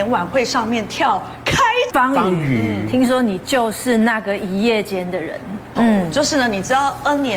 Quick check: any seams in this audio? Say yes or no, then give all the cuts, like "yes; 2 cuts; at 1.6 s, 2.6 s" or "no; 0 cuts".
yes; 2 cuts; at 1.9 s, 5.8 s